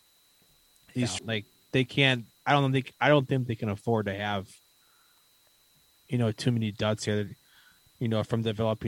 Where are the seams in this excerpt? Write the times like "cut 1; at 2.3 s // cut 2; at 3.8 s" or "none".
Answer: cut 1; at 1.2 s